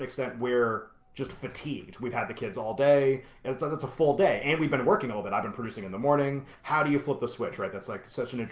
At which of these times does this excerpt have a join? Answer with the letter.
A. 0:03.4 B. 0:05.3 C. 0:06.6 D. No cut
C